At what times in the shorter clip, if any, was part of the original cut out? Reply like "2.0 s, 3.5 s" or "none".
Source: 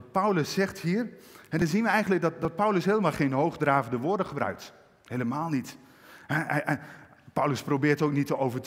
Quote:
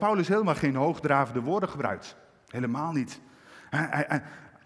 none